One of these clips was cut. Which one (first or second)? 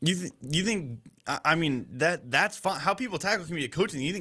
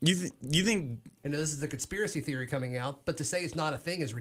second